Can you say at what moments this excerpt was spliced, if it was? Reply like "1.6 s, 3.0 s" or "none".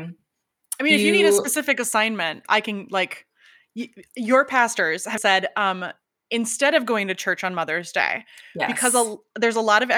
2.5 s, 5.2 s